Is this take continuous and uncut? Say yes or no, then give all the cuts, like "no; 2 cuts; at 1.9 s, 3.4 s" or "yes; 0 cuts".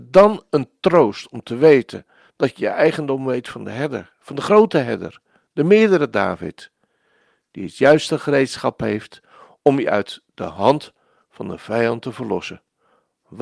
yes; 0 cuts